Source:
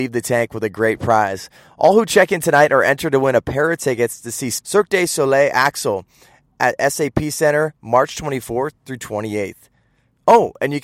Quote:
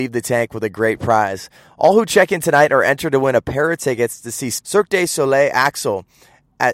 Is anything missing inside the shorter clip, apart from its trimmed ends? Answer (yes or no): no